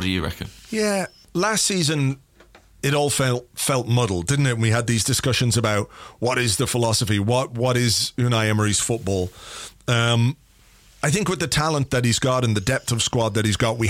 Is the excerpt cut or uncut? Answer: uncut